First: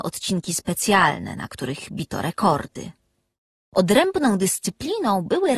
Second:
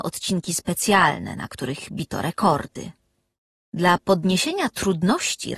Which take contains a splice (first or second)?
first